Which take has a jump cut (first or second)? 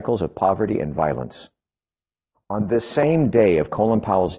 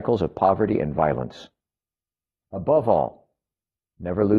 first